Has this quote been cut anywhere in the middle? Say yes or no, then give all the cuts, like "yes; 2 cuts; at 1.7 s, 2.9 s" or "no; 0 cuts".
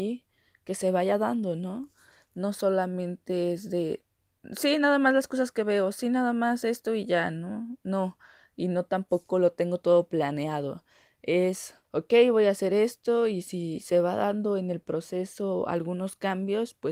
yes; 1 cut; at 11.8 s